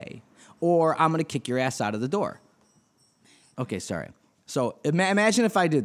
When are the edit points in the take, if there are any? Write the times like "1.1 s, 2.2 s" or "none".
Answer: 3.5 s